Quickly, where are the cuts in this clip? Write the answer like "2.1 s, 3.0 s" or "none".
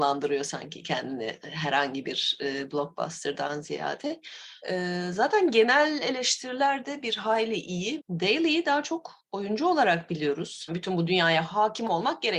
4.6 s, 8.0 s, 10.7 s